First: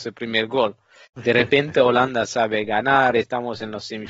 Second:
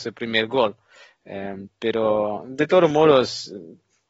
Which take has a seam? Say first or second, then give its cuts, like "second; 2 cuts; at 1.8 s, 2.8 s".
first; 2 cuts; at 1.0 s, 3.1 s